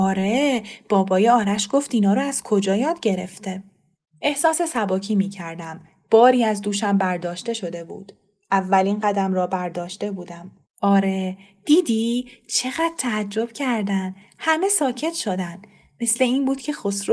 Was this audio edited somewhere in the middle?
yes; 1 cut; at 10.6 s

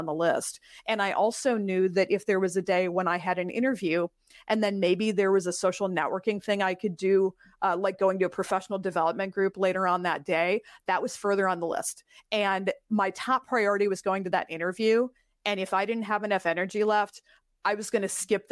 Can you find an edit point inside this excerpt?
no; 0 cuts

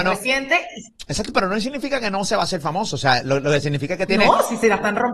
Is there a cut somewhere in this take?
no; 0 cuts

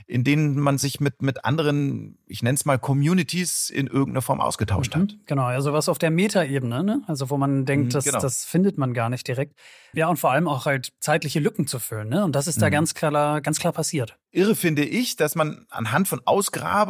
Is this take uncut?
no; 1 cut; at 9.9 s

